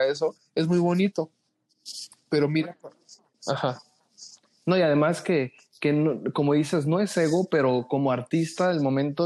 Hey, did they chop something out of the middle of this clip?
no; 0 cuts

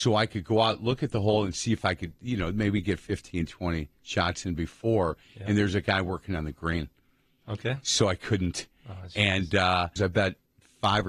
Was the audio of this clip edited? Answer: yes; 1 cut; at 10.0 s

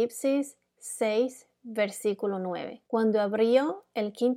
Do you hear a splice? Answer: yes; 1 cut; at 2.8 s

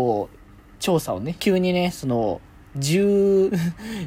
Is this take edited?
yes; 2 cuts; at 1.4 s, 2.6 s

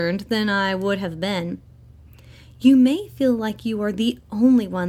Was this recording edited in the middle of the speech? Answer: no; 0 cuts

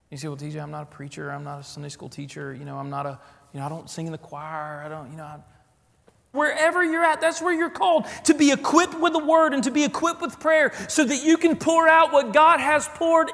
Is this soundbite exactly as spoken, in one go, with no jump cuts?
no; 1 cut; at 6.3 s

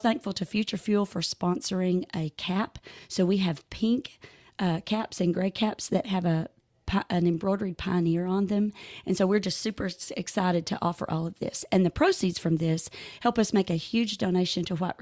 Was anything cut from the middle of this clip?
no; 0 cuts

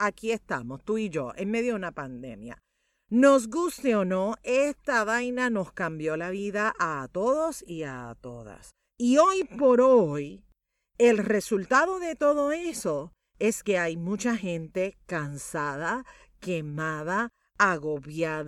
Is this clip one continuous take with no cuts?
no; 1 cut; at 8.9 s

